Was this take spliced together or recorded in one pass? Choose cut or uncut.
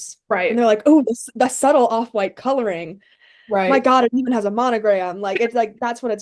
uncut